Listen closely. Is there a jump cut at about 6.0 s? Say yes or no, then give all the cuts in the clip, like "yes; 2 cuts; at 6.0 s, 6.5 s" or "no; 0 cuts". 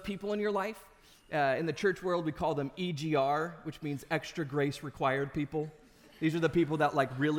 no; 0 cuts